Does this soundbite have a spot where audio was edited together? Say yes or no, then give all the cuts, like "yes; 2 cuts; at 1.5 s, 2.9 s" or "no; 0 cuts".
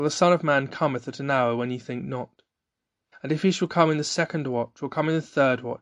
yes; 1 cut; at 3.1 s